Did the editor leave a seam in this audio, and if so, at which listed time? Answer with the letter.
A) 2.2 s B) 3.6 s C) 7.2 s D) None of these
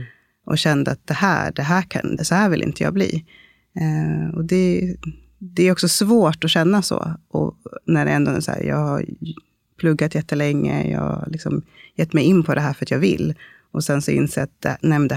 A